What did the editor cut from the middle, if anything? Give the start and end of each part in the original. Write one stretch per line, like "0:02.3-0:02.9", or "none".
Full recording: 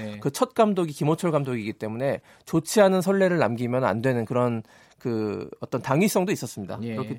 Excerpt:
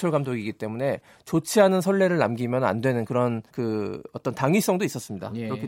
0:04.7-0:04.9

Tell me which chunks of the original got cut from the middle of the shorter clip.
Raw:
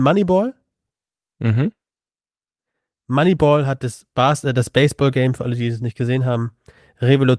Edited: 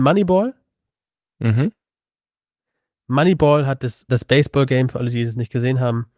0:04.1-0:04.5

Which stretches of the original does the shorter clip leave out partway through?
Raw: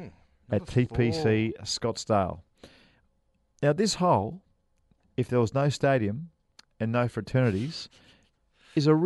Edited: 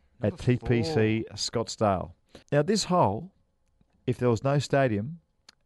0:02.7-0:03.5

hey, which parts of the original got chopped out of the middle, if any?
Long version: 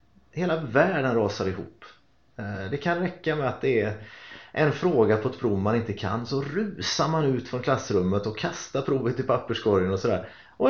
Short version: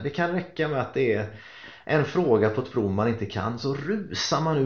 none

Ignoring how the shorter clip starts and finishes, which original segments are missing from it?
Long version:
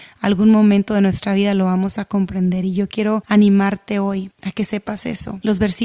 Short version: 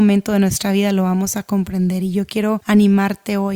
none

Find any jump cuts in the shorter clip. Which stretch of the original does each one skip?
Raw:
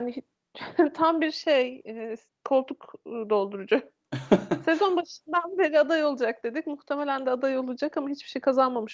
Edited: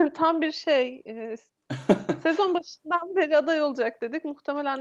0:02.4-0:04.0

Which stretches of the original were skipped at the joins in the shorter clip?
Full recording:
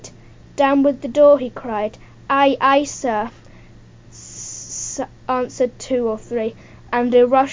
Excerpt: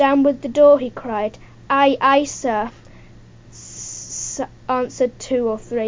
none

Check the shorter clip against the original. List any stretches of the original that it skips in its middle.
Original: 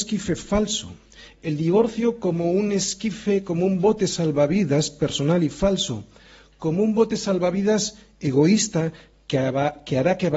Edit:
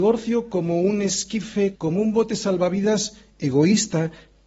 0:03.4-0:06.6

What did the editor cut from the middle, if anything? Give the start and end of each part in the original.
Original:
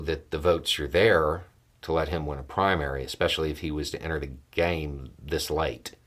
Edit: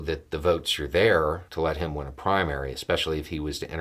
0:01.5-0:01.8

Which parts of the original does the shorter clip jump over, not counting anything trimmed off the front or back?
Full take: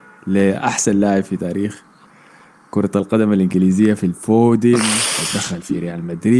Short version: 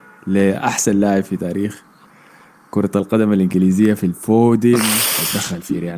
none

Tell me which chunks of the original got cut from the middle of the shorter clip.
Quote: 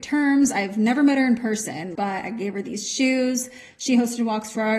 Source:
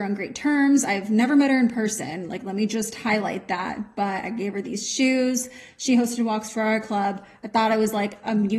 0:02.3-0:03.9

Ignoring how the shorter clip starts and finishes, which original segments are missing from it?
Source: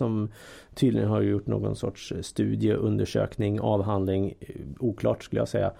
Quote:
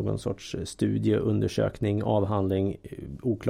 none

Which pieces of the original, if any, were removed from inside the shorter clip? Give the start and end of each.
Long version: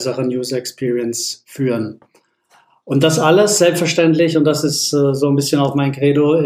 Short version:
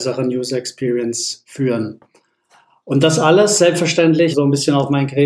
0:04.3-0:05.2

